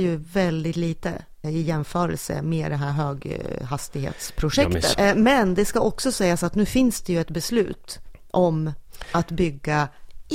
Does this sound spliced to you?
yes; 2 cuts; at 1.4 s, 4.9 s

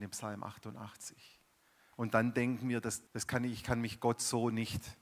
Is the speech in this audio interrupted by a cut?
yes; 2 cuts; at 1.9 s, 3.1 s

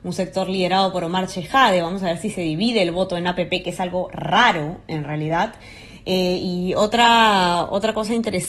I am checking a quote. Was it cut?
no; 0 cuts

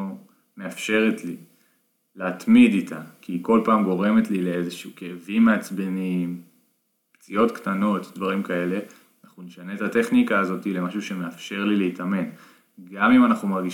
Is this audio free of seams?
yes; 0 cuts

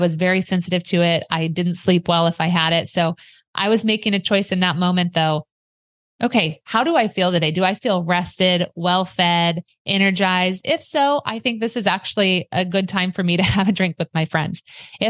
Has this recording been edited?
no; 0 cuts

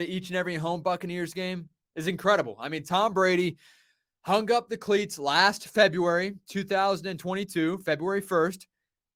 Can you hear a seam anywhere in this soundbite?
no; 0 cuts

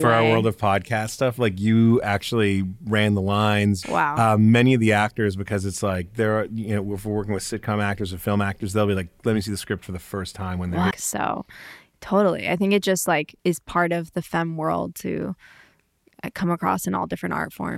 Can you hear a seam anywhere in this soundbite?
yes; 3 cuts; at 3.8 s, 10.9 s, 13.4 s

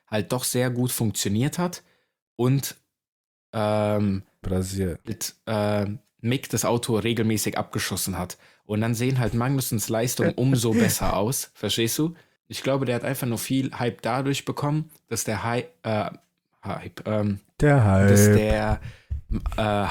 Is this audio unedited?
no; 2 cuts; at 4.4 s, 12.4 s

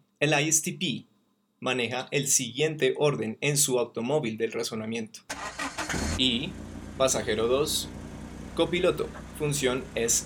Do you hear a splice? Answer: yes; 2 cuts; at 6.2 s, 8.5 s

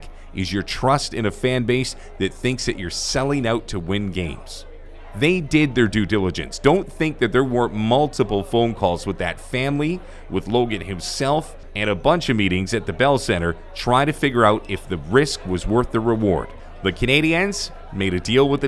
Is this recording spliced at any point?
no; 0 cuts

